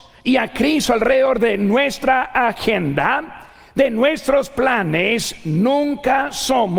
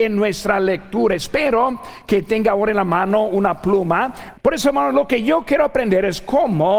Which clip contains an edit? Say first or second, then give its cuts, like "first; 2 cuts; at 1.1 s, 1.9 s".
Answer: second; 1 cut; at 4.3 s